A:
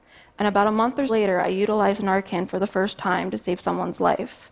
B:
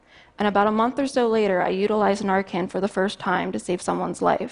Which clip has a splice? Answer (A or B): A